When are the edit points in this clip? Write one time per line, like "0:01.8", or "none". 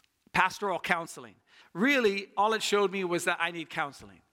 0:01.6

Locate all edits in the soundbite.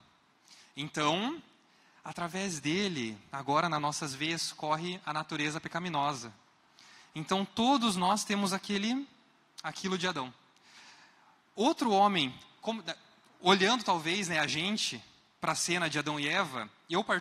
none

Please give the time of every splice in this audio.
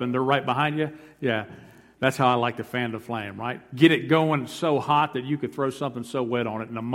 none

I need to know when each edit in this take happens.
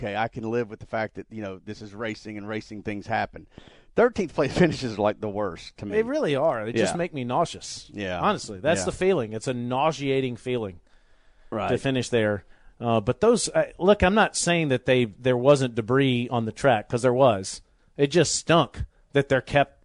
none

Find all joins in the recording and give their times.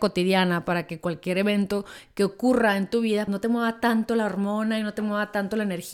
0:03.3

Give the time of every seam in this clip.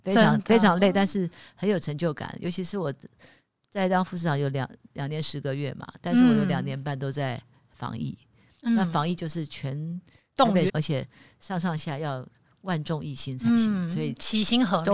0:10.7
0:11.8

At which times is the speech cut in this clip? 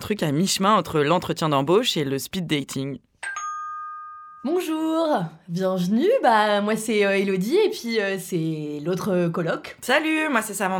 none

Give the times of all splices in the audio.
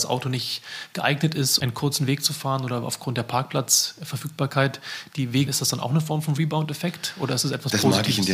0:01.6
0:05.5

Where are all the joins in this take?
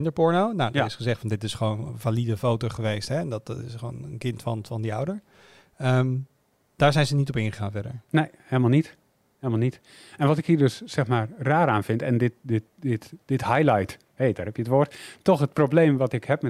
none

